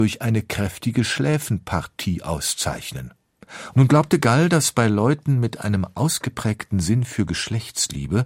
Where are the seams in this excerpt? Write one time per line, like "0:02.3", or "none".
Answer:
0:03.7